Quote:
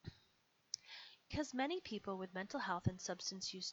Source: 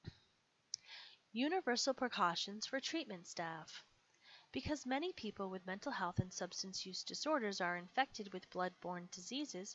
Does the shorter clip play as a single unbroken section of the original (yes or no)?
no